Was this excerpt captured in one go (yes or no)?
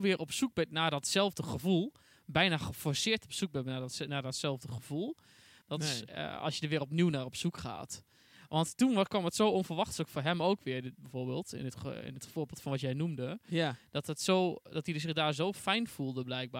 no